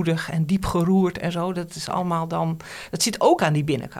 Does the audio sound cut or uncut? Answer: uncut